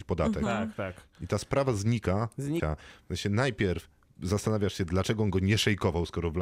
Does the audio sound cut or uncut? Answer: cut